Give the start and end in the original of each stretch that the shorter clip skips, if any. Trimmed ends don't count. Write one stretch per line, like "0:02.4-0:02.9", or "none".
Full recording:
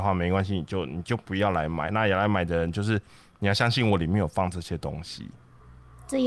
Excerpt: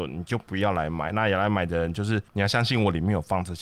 0:03.1-0:03.3